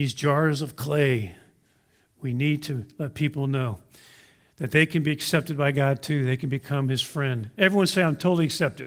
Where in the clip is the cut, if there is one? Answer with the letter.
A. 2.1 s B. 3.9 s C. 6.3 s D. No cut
D